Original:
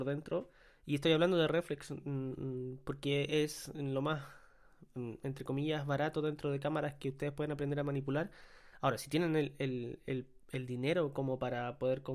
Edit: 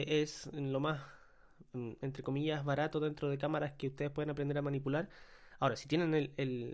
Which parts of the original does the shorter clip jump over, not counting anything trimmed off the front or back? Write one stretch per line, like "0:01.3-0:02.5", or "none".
none